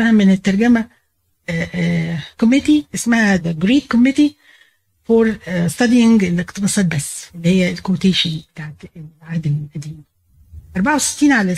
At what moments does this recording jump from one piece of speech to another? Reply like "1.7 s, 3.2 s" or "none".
2.3 s, 3.4 s, 7.3 s